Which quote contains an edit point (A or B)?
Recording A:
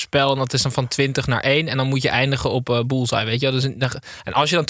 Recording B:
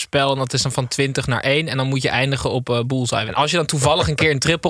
B